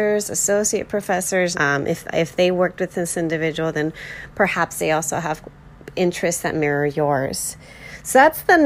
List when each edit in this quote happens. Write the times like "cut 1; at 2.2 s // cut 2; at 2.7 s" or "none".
cut 1; at 1.5 s

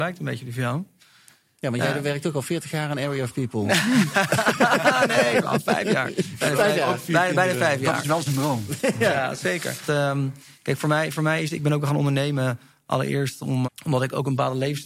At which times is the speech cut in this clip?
cut 1; at 9.9 s // cut 2; at 13.6 s

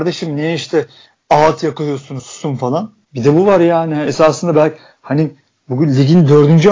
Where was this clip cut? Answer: cut 1; at 3.1 s

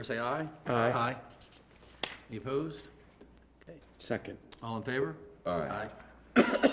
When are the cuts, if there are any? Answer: cut 1; at 3.8 s

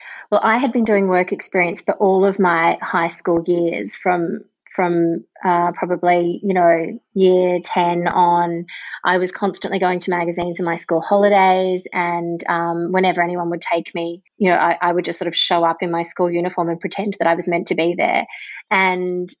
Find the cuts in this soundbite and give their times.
cut 1; at 14.3 s

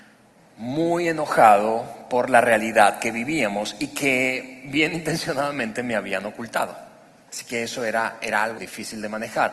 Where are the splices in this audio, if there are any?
cut 1; at 7.3 s // cut 2; at 8.6 s

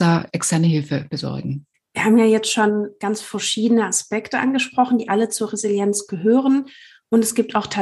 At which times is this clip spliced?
none

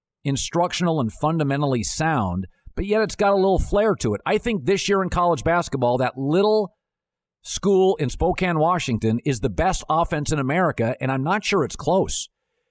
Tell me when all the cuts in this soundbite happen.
none

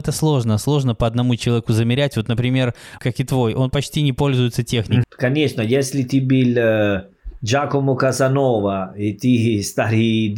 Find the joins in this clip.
cut 1; at 3.0 s // cut 2; at 5.0 s

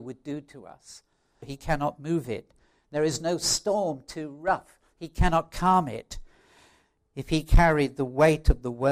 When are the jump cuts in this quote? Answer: cut 1; at 1.4 s

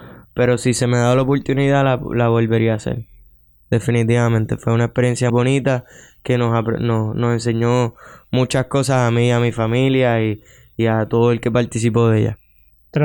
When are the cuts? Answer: cut 1; at 5.3 s

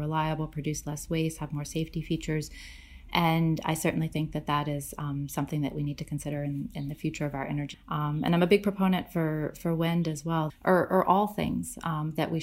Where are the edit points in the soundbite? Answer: cut 1; at 7.7 s // cut 2; at 10.5 s

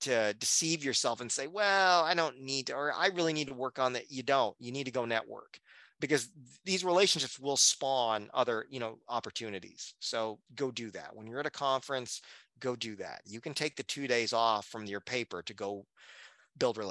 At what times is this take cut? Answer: cut 1; at 10.5 s

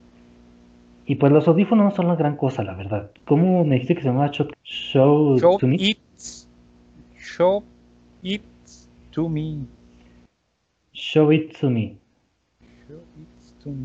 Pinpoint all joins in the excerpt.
cut 1; at 3.1 s // cut 2; at 4.5 s

